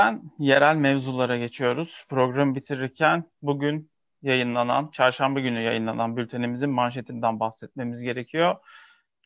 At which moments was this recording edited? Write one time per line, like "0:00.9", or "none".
none